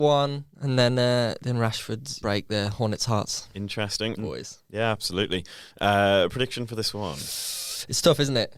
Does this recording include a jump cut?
yes; 2 cuts; at 2.2 s, 4.2 s

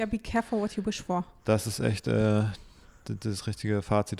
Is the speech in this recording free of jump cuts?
yes; 0 cuts

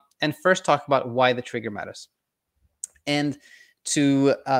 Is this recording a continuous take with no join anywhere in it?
yes; 0 cuts

